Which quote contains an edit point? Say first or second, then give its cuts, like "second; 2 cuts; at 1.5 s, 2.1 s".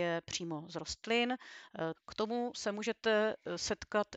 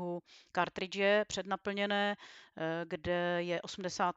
first; 1 cut; at 1.9 s